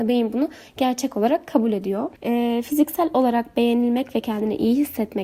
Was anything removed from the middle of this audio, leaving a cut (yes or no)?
yes